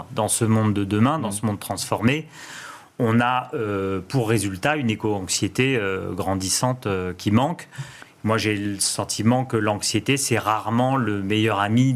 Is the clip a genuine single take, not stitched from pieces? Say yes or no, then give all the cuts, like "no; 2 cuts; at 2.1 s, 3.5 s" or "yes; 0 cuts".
yes; 0 cuts